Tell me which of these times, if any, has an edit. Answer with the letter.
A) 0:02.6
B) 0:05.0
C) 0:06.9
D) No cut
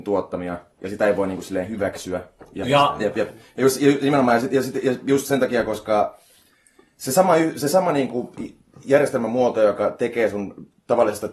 A